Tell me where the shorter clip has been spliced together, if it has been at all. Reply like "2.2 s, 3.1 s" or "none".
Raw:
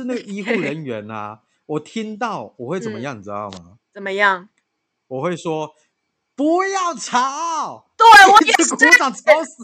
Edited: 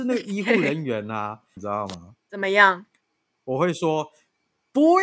1.6 s